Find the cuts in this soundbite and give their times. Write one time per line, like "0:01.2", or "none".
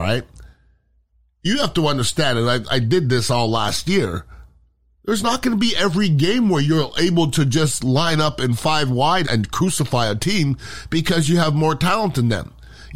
0:05.0
0:09.2